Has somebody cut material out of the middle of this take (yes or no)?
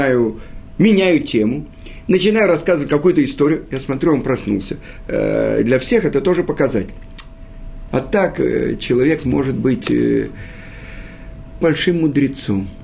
yes